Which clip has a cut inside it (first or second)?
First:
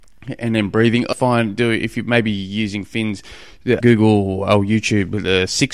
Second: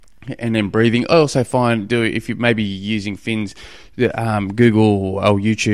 first